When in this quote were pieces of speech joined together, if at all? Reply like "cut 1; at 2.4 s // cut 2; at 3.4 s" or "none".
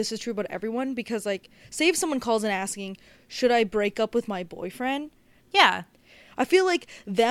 cut 1; at 5.4 s